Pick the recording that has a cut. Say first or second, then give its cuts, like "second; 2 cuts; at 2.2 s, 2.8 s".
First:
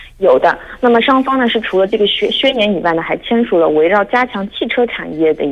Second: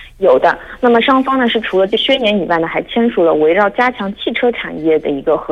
second; 1 cut; at 2.0 s